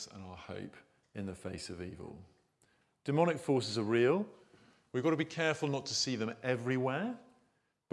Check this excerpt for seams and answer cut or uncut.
uncut